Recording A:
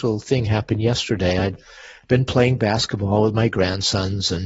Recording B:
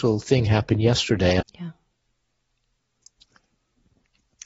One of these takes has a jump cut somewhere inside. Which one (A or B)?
B